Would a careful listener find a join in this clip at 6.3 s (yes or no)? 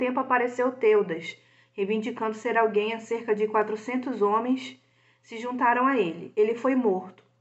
no